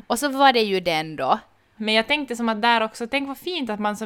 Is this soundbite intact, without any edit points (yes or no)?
no